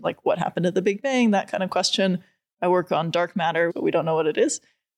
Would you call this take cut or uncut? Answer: cut